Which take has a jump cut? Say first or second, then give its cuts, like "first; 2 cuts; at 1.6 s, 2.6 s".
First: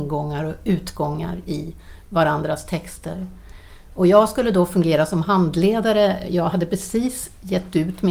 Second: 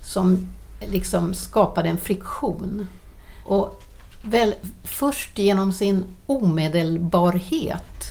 second; 1 cut; at 3.4 s